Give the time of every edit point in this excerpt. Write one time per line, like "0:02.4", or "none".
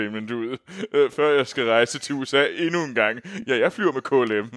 none